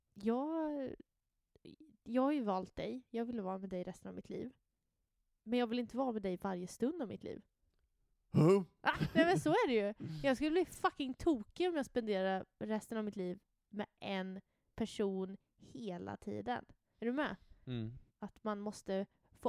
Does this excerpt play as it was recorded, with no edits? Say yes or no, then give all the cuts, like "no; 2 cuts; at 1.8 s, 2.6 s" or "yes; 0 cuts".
no; 3 cuts; at 8.9 s, 16.9 s, 18.1 s